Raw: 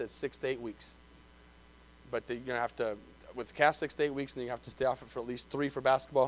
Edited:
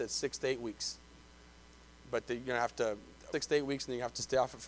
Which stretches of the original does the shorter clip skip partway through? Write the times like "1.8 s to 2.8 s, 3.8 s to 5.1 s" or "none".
3.3 s to 3.8 s

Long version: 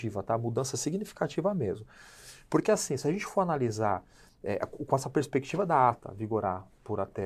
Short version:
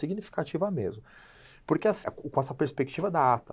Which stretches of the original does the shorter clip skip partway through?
2.9 s to 4.6 s

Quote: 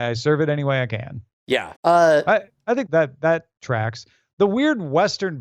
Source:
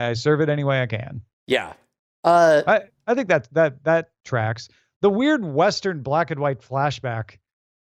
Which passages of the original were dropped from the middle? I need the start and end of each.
1.8 s to 2.2 s, 3.3 s to 3.5 s

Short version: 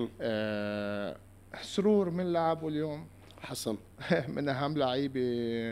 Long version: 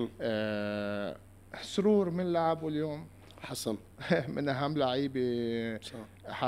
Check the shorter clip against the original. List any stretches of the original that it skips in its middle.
none

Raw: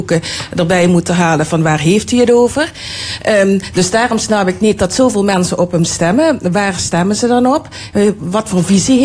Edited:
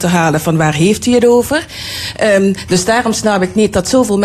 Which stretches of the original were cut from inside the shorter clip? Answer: none

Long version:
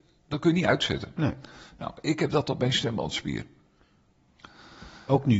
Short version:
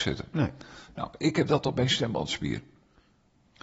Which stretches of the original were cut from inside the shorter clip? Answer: none

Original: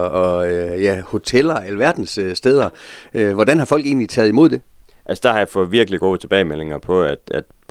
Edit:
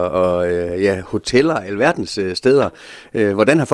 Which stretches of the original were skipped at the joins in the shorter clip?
none

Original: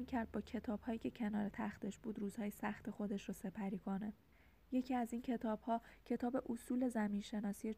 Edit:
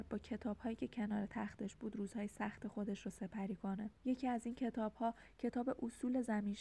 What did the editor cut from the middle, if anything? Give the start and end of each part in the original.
4.2 s to 4.6 s

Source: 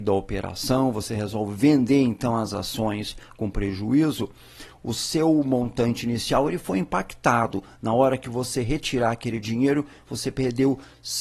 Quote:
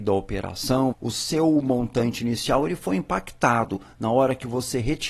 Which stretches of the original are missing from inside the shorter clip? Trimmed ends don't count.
0.9 s to 4.7 s

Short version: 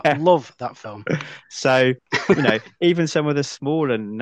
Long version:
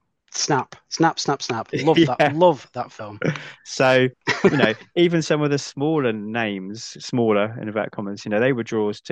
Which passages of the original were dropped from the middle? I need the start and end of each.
none

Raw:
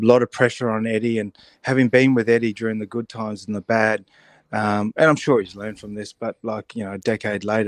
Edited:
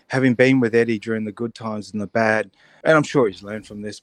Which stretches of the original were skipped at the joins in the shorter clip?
4.3 s to 4.9 s

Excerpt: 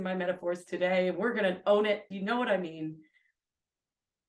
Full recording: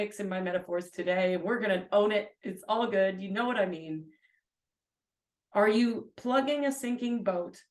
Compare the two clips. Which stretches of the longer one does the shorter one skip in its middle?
2.4 s to 3.2 s

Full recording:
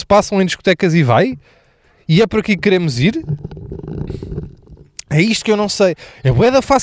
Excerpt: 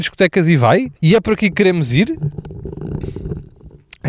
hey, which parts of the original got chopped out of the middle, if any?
1.4 s to 2.0 s

